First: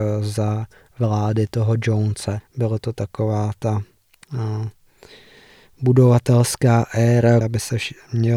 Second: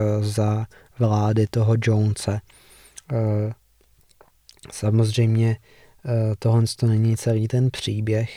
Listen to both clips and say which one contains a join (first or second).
first